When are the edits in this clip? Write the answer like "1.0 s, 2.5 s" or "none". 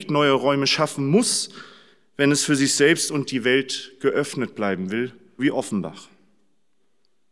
5.4 s